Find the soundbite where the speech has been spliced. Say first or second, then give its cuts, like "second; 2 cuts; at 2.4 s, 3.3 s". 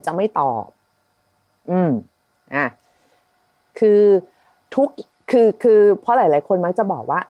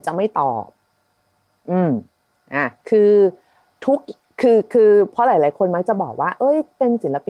second; 1 cut; at 2.8 s